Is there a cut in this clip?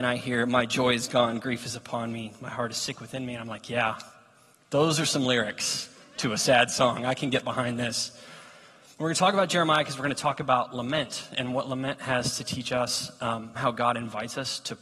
yes; 1 cut; at 13.6 s

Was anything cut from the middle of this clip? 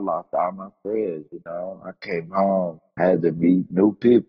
yes; 1 cut; at 2.9 s

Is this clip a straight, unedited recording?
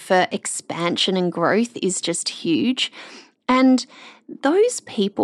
yes; 0 cuts

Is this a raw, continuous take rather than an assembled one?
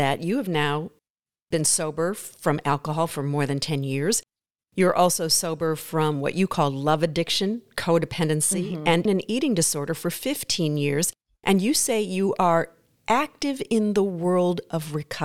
no; 1 cut; at 9.1 s

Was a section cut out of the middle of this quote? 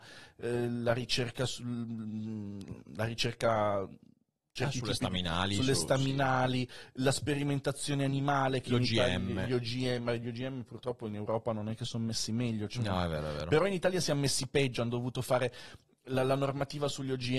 no; 0 cuts

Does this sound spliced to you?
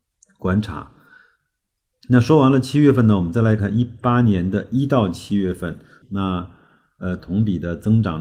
yes; 3 cuts; at 3.6 s, 6.0 s, 7.2 s

